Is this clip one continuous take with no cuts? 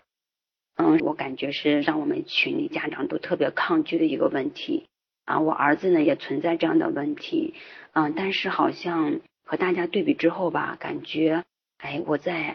no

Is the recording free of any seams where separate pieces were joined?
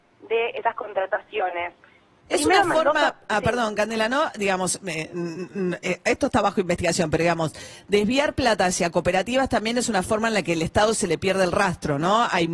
no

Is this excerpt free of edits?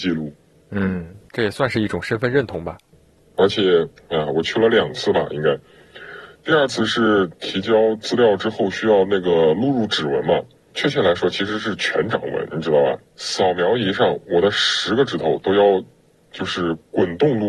yes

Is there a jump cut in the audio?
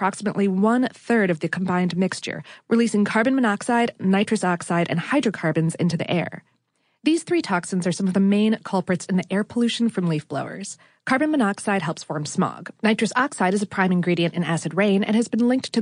no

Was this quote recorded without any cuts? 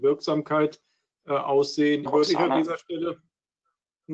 no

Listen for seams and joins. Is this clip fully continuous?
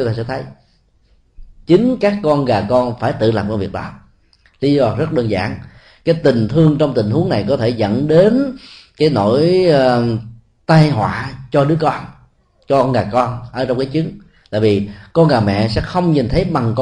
yes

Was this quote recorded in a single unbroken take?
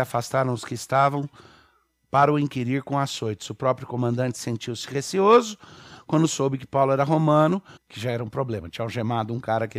no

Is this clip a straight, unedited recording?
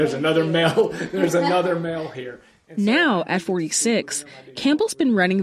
yes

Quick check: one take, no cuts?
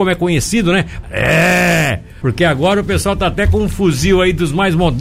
no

